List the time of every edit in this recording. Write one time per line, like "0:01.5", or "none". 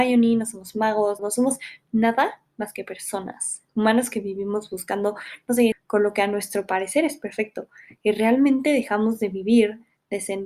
0:01.2
0:03.7
0:05.7